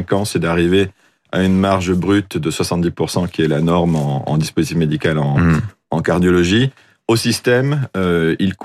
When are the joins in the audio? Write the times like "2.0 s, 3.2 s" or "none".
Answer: none